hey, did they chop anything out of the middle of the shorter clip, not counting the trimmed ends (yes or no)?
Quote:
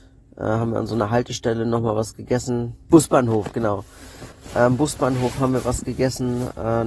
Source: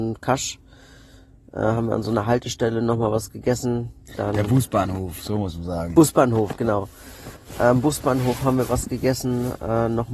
yes